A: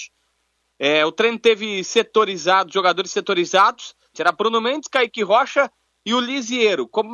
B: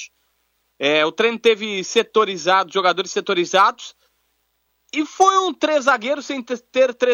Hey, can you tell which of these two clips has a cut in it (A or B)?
A